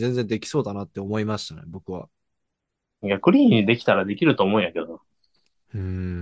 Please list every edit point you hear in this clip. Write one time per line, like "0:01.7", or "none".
none